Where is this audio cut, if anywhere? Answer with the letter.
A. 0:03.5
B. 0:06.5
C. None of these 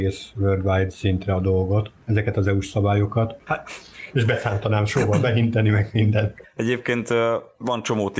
A